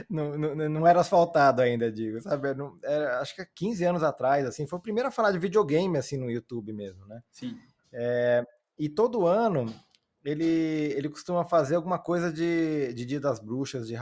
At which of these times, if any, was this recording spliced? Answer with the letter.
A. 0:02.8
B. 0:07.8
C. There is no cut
C